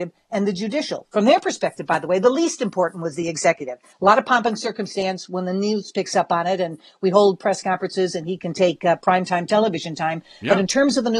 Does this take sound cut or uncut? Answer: cut